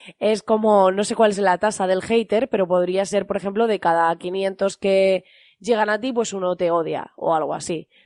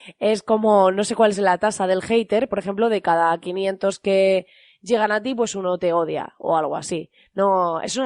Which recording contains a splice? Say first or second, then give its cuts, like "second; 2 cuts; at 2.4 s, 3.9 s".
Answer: second; 1 cut; at 2.5 s